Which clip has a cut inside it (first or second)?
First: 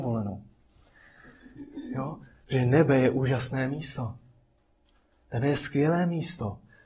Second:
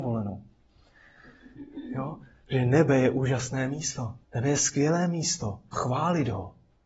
second